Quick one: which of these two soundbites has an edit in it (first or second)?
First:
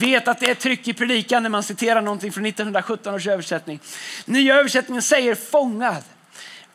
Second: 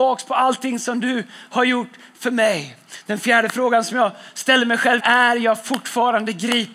second